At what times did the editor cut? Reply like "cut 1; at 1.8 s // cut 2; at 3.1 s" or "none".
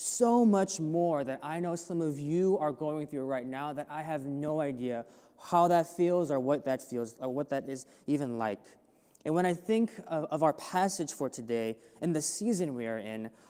none